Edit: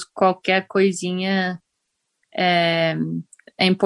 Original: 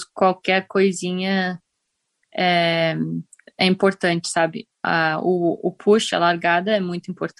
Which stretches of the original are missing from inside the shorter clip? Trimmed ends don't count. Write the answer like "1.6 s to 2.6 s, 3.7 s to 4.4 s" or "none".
none